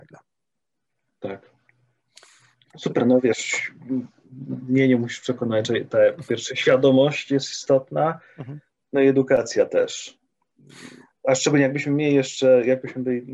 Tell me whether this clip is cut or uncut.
uncut